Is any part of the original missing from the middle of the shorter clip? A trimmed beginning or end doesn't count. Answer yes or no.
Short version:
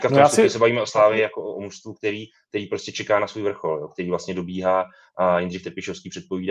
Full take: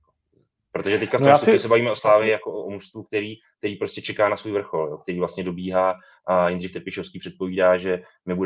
no